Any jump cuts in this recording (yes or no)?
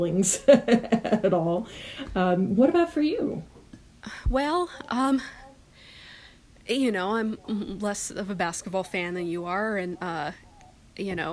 no